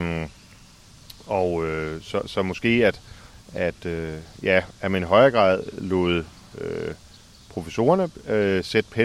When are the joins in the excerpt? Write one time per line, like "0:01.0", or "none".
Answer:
none